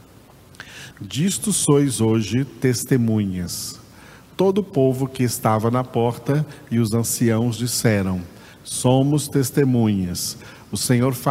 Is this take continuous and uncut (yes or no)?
no